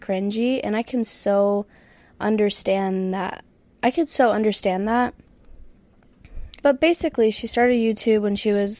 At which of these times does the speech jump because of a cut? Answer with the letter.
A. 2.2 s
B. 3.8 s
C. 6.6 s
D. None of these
C